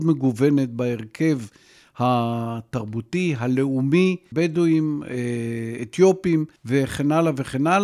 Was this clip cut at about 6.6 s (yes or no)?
yes